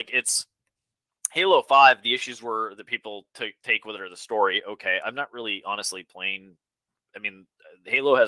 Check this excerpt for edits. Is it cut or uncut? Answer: uncut